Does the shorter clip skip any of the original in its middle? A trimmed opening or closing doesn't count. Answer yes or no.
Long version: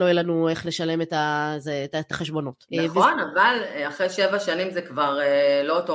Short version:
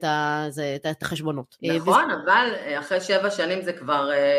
no